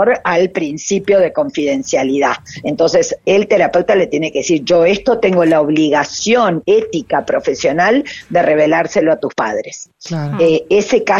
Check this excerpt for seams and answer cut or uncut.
uncut